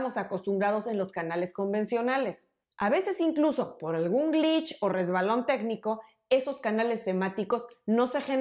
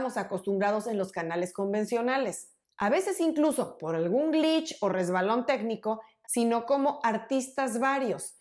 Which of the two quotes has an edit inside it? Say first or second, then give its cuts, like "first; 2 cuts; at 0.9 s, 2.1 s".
second; 1 cut; at 6.2 s